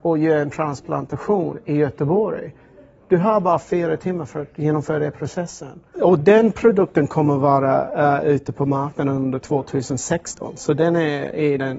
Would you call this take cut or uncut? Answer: cut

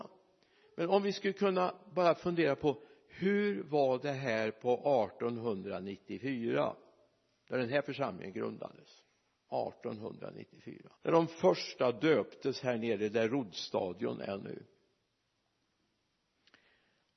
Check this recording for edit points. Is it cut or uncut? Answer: cut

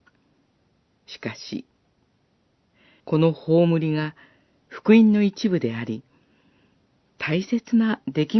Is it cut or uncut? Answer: cut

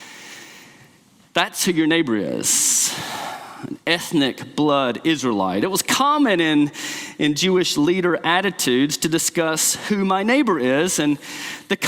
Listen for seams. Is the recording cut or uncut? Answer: cut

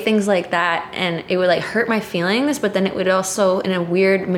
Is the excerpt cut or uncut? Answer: uncut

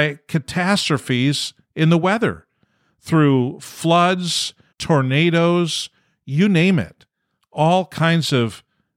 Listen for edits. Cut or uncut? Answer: cut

